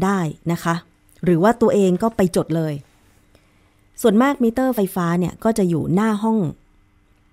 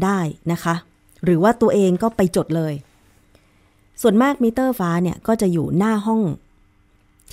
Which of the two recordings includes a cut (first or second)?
second